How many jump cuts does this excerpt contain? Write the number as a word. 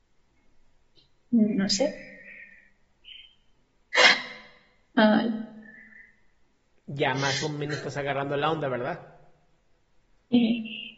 zero